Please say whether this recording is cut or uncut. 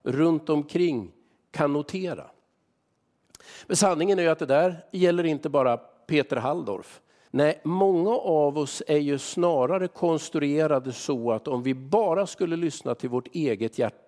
cut